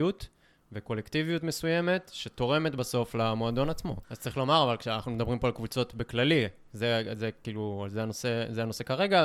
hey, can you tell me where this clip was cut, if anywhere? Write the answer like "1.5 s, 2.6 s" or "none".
4.0 s